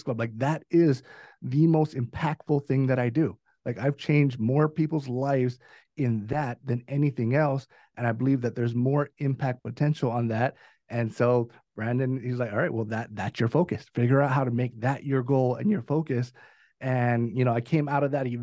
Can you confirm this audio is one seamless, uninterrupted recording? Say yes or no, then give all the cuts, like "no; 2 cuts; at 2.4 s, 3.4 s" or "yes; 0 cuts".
yes; 0 cuts